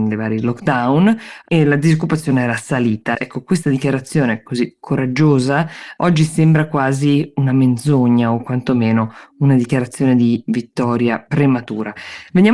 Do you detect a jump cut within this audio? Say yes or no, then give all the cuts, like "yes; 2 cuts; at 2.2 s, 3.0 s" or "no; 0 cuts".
yes; 1 cut; at 3.1 s